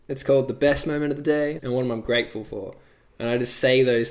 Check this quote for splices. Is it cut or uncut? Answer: cut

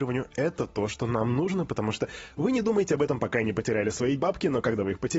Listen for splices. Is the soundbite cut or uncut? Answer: uncut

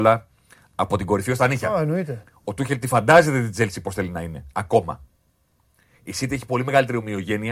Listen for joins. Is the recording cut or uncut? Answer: cut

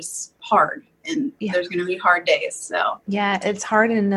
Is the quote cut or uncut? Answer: cut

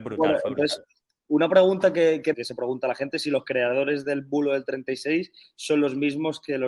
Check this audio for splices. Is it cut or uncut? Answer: cut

